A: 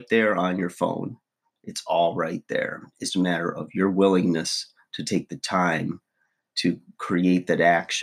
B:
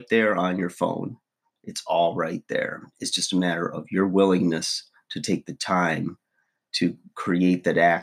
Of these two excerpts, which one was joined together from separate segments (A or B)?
A